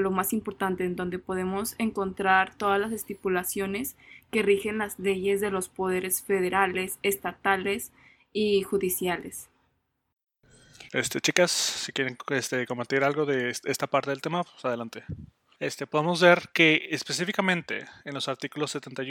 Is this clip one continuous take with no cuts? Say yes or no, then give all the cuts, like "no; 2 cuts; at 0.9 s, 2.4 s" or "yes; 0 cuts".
no; 2 cuts; at 10.9 s, 15.6 s